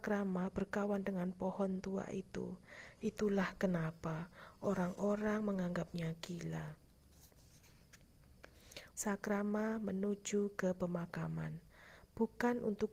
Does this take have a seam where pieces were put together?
yes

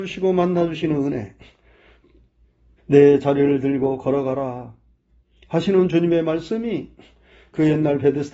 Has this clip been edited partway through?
yes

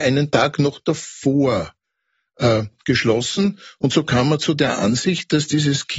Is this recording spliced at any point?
no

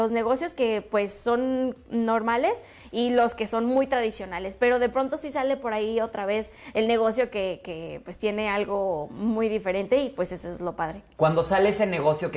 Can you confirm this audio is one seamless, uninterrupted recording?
yes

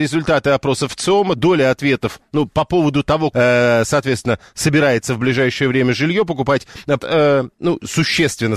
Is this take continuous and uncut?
no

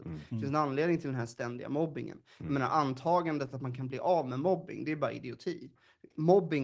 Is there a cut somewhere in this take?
no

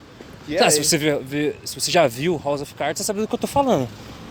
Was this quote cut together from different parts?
no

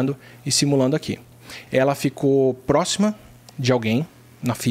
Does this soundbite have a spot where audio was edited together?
yes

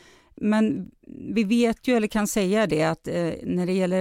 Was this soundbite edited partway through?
no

